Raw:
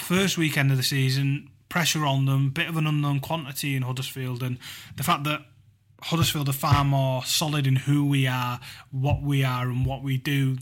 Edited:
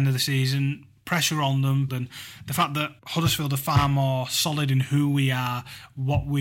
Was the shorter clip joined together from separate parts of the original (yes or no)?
yes